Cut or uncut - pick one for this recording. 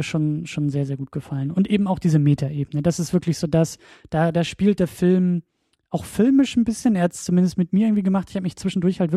uncut